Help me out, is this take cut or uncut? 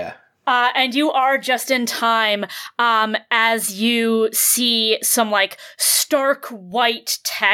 uncut